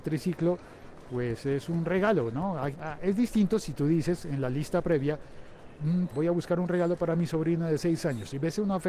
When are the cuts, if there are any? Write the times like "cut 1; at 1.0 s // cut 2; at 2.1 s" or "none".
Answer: cut 1; at 2.7 s // cut 2; at 6.1 s